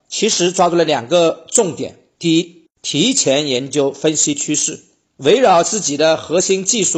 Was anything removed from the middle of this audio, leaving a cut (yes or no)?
yes